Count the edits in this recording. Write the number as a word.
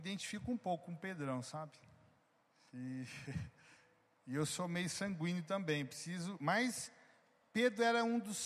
one